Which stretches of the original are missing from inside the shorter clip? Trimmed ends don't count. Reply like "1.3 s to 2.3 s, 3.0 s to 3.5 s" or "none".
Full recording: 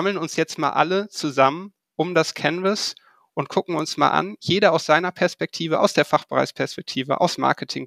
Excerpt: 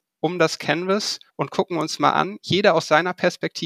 3.0 s to 3.3 s